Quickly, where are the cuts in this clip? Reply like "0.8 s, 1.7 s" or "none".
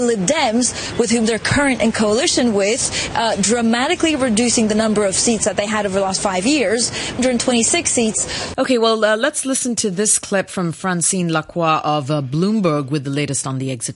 7.2 s, 8.5 s

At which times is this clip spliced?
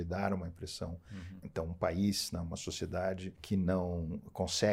1.4 s, 3.4 s

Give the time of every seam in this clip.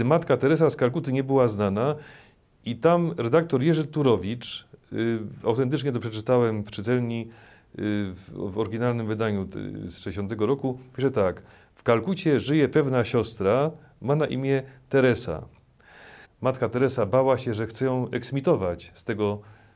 16.2 s

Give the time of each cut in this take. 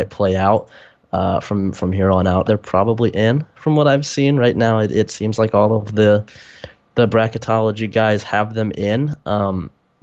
2.4 s

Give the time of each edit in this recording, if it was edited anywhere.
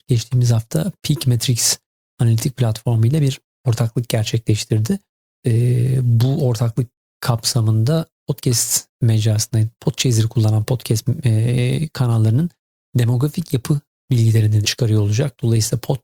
9.8 s, 14.6 s

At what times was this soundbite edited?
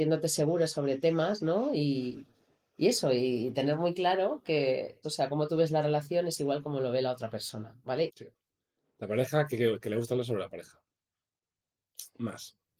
5.0 s, 8.1 s

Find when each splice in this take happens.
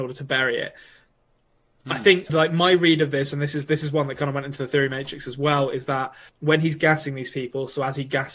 2.3 s, 6.3 s

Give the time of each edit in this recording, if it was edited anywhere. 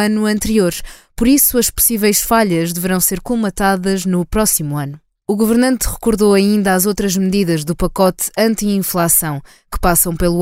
5.2 s

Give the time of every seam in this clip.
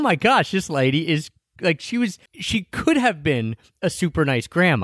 2.3 s

